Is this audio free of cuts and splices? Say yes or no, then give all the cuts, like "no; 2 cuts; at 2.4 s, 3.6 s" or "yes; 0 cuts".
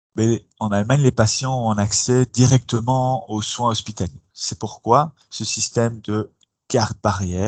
no; 1 cut; at 4.3 s